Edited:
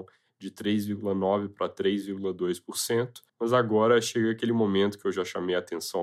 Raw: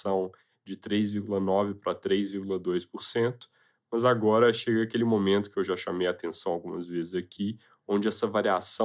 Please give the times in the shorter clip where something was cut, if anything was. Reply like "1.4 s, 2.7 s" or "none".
3.3 s